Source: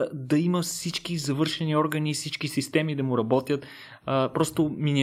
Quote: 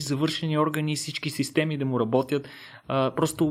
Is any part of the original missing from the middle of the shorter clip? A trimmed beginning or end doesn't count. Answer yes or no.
no